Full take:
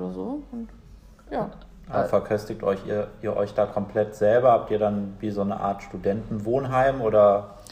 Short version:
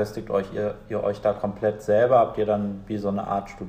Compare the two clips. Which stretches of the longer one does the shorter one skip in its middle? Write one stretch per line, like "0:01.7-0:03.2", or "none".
none